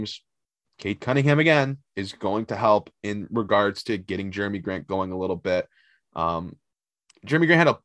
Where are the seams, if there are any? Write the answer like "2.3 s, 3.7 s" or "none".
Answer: none